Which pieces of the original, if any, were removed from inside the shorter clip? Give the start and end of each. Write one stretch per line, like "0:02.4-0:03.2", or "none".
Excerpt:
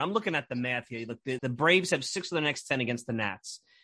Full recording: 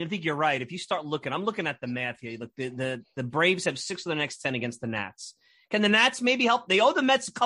0:02.7-0:03.1